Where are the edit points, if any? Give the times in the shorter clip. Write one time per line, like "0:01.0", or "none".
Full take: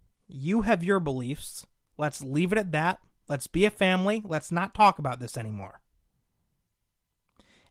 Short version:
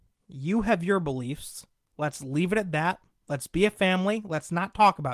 none